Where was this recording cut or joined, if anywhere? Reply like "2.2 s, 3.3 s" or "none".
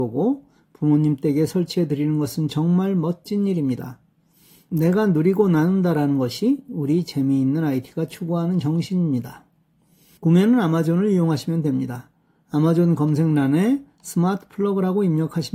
none